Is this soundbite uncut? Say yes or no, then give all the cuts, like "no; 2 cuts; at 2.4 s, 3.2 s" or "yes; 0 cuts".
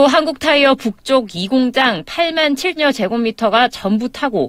no; 1 cut; at 2.8 s